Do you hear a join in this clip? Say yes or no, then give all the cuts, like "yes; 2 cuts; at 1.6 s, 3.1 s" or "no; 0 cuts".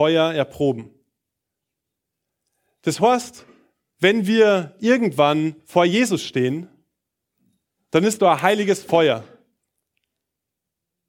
no; 0 cuts